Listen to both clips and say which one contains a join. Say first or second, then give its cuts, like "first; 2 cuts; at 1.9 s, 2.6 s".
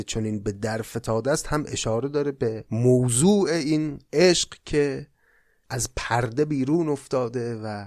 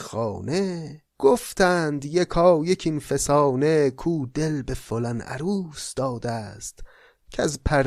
second; 1 cut; at 1.1 s